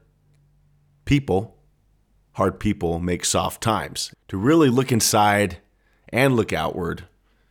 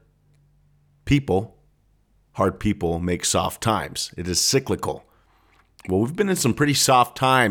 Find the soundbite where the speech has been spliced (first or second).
first